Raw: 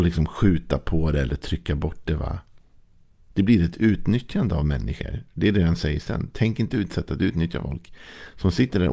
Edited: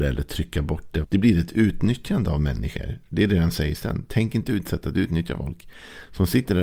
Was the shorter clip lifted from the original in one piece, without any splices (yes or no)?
no